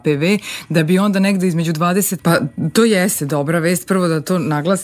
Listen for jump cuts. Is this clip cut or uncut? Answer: cut